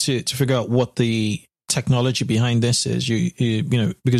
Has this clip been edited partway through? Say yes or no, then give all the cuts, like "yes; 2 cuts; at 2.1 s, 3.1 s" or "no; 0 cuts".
no; 0 cuts